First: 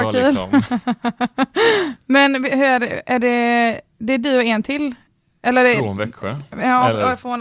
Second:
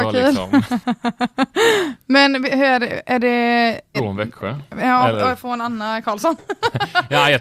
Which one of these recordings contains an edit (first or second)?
second